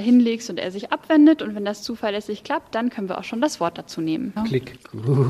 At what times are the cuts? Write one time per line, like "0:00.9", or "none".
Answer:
0:04.4